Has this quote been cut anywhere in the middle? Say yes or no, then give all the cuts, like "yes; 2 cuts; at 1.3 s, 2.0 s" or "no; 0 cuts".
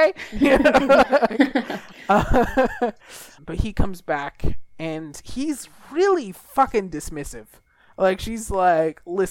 yes; 1 cut; at 3.4 s